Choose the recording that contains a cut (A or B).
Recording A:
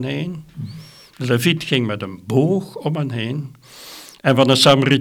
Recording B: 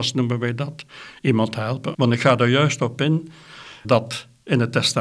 B